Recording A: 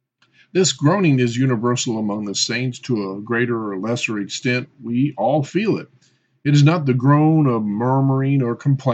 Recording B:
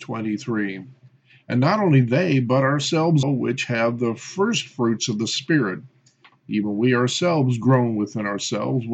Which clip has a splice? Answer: B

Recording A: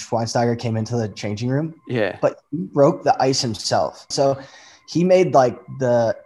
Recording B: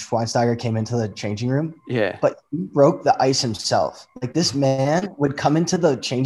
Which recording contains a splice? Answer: A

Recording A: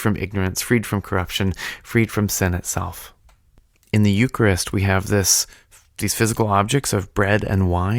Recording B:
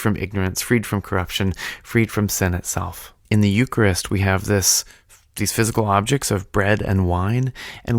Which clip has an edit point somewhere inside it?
B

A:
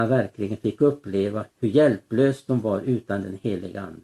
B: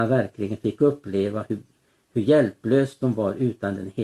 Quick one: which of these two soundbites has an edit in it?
A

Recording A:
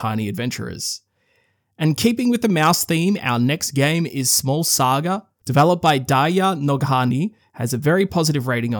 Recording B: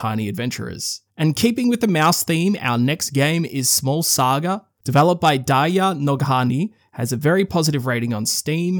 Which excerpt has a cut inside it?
B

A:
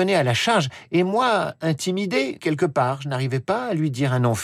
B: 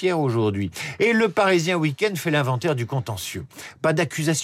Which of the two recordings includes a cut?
A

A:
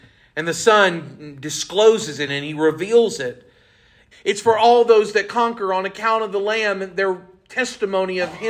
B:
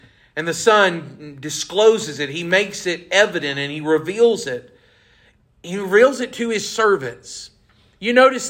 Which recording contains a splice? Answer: A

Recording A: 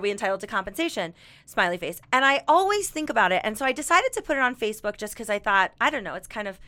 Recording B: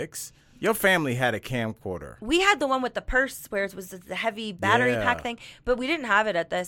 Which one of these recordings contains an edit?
A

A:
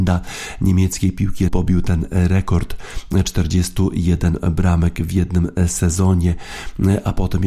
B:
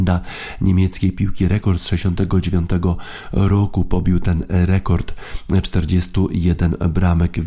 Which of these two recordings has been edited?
A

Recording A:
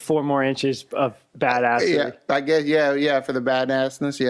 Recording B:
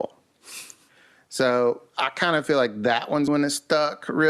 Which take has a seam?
B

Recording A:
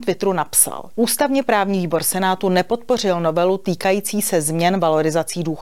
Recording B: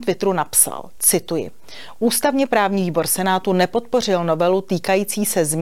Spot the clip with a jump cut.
A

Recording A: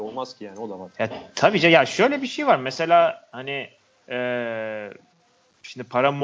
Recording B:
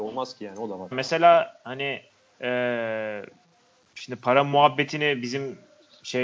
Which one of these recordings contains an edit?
B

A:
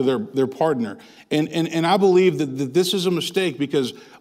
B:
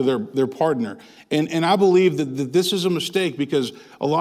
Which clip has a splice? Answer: B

